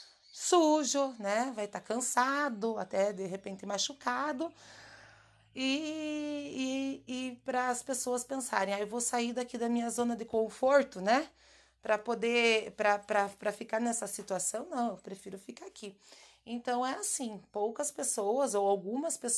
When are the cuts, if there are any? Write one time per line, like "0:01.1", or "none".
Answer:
none